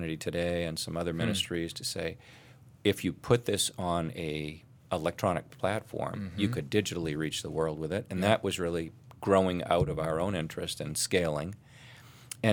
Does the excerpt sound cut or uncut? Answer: uncut